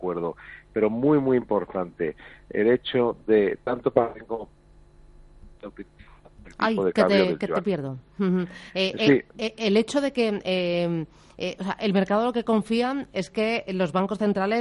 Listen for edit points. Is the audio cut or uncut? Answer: uncut